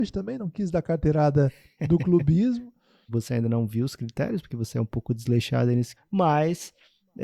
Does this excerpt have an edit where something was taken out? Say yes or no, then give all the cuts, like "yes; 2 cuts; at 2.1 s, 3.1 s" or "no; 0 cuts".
yes; 2 cuts; at 3.1 s, 6.0 s